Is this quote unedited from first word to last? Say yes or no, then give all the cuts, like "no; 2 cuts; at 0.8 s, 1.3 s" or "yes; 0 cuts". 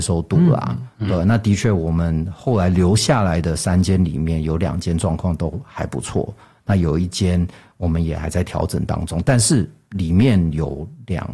yes; 0 cuts